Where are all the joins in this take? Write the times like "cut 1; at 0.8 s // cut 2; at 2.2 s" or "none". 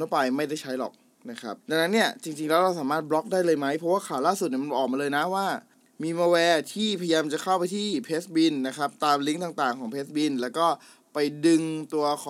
cut 1; at 1.6 s

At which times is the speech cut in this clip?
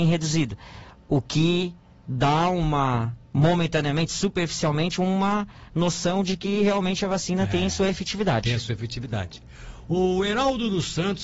cut 1; at 3.2 s

